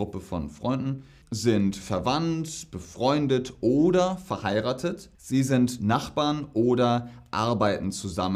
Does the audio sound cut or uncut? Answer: cut